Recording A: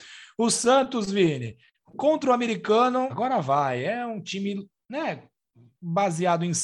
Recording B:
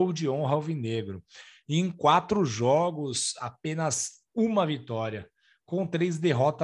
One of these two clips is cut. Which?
A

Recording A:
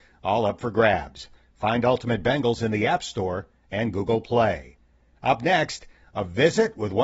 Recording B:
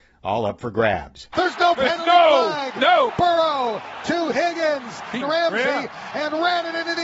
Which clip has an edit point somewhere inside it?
B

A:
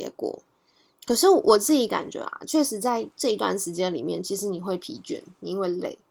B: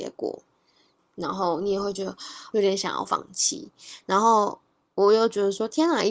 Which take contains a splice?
B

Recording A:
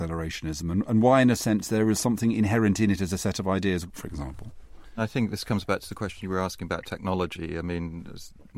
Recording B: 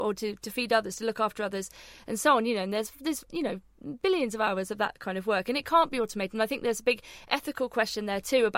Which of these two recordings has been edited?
A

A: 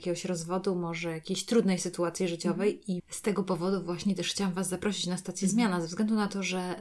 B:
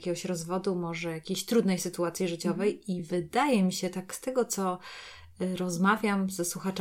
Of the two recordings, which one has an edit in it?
A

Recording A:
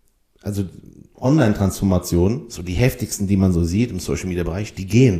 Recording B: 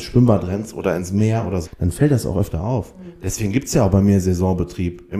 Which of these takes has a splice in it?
B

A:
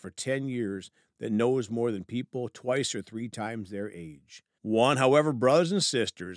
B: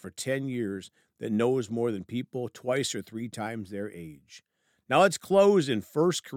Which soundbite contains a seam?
A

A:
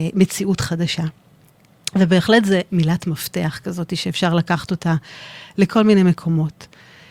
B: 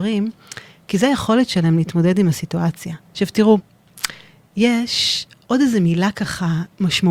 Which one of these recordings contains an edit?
B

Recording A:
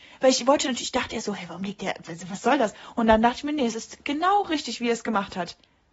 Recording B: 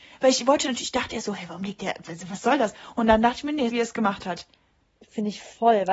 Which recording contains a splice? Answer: B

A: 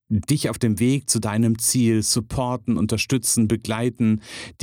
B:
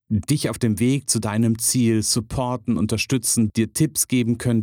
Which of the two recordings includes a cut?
B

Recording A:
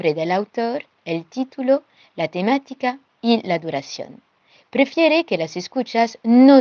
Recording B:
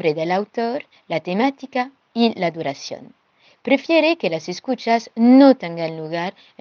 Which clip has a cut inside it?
B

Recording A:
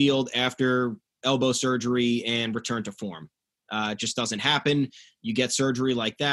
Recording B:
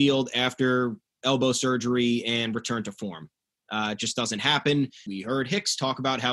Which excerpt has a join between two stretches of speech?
B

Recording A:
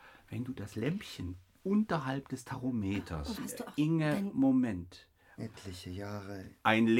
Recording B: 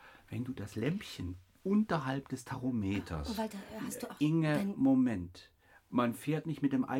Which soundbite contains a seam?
A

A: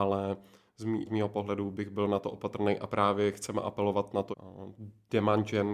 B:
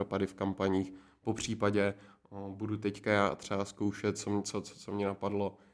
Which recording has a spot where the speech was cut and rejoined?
A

